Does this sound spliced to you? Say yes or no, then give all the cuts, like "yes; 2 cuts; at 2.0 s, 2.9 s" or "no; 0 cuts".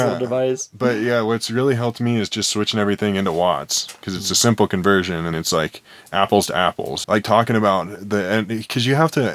yes; 2 cuts; at 5.3 s, 7.0 s